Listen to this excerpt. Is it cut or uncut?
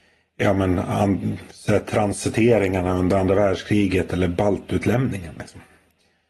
uncut